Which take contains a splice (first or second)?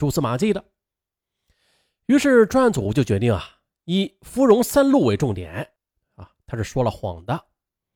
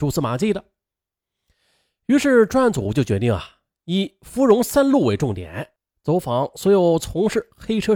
first